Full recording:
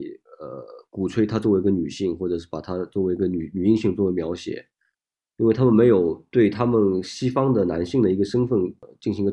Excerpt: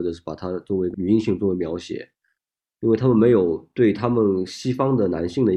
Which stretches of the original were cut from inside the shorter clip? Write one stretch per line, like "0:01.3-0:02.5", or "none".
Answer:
0:03.2-0:03.5